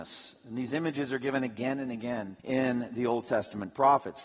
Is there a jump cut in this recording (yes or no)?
yes